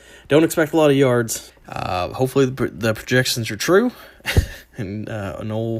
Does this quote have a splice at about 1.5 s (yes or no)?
yes